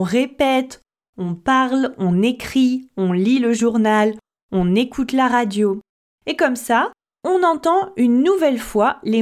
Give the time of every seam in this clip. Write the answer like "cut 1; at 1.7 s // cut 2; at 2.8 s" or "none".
none